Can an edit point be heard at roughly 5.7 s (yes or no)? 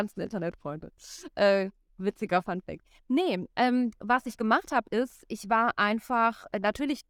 no